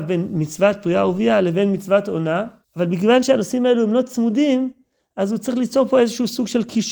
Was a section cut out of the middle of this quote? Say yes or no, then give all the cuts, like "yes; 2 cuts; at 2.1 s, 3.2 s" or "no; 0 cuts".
yes; 1 cut; at 2.6 s